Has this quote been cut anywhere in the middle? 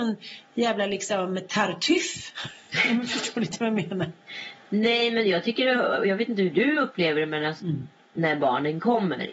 yes; 1 cut; at 7.6 s

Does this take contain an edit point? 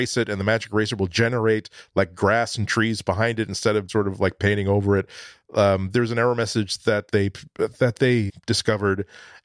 yes; 2 cuts; at 3.9 s, 8.3 s

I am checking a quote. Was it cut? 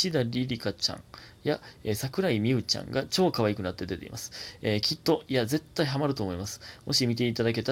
no; 0 cuts

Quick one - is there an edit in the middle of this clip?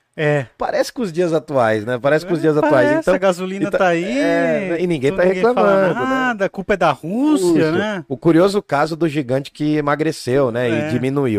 no; 0 cuts

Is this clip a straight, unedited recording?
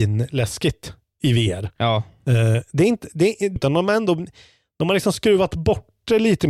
no; 1 cut; at 3.6 s

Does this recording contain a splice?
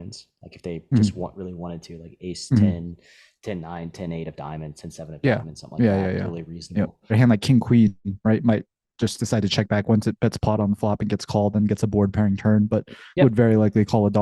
yes; 1 cut; at 7.1 s

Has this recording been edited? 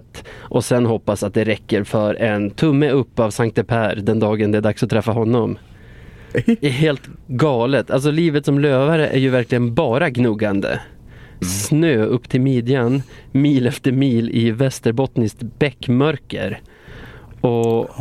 yes; 2 cuts; at 6.3 s, 11.4 s

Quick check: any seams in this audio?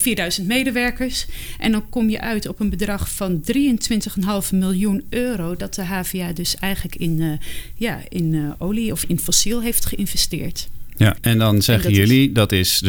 yes; 2 cuts; at 9.0 s, 11.2 s

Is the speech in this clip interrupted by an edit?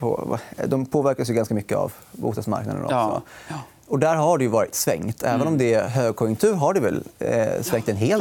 no; 0 cuts

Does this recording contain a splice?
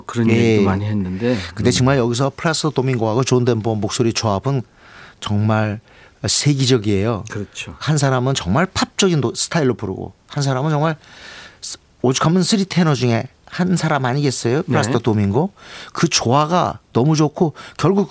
no; 0 cuts

